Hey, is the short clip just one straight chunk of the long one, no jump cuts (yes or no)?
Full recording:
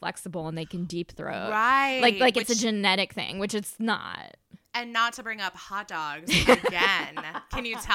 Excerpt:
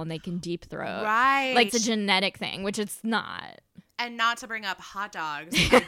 no